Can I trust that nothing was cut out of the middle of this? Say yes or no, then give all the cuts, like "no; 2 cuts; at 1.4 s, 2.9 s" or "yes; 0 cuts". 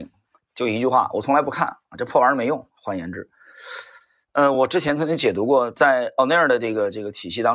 yes; 0 cuts